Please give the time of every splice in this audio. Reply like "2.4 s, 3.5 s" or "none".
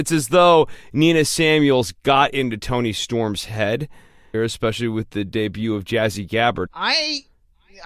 4.3 s, 6.7 s

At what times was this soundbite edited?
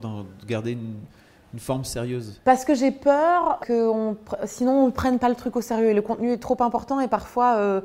3.6 s

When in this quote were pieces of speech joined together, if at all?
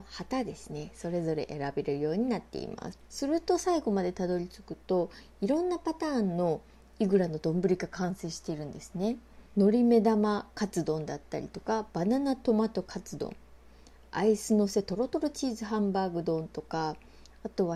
2.9 s, 9.5 s

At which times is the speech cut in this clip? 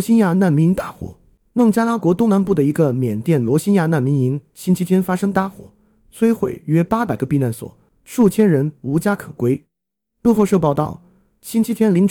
none

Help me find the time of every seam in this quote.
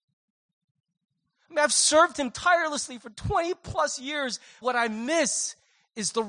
4.6 s

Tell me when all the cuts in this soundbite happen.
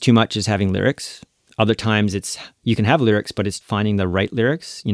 3.6 s

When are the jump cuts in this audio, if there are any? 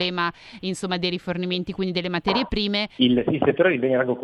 3.0 s

